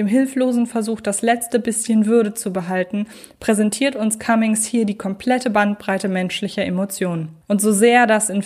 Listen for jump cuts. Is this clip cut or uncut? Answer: cut